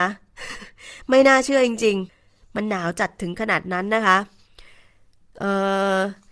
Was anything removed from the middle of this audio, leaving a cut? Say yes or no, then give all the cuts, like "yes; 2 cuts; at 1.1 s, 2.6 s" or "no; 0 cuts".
yes; 1 cut; at 2.1 s